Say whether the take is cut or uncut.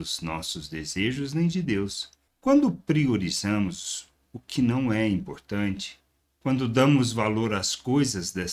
cut